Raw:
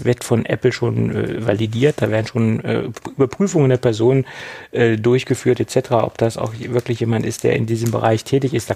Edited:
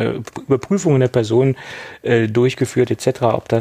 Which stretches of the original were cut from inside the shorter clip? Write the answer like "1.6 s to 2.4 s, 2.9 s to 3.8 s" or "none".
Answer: none